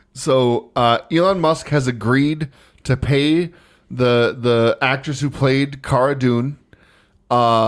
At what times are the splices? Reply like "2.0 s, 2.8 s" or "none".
none